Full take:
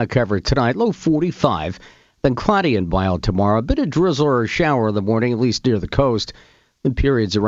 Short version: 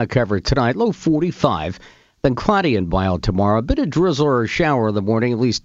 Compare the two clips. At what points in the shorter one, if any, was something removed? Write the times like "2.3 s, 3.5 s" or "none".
none